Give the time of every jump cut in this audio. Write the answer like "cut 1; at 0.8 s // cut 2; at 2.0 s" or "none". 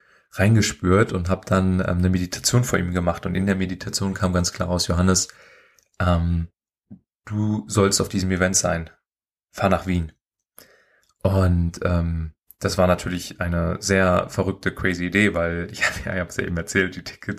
none